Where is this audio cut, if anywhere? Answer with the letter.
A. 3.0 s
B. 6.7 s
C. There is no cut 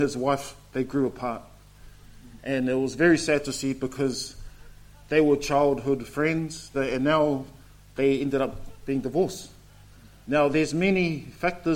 B